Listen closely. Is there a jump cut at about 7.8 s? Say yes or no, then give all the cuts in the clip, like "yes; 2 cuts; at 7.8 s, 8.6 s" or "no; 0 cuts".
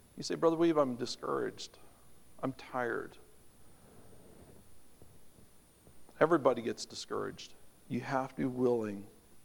yes; 1 cut; at 7.8 s